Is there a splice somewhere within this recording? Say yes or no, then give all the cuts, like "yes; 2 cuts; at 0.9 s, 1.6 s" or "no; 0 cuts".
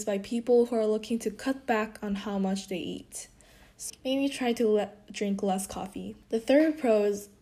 yes; 2 cuts; at 3.9 s, 6.2 s